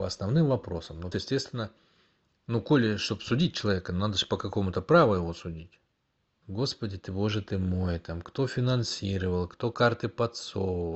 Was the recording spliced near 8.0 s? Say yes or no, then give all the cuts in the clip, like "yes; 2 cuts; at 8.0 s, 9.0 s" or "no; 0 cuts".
no; 3 cuts; at 1.1 s, 6.4 s, 9.5 s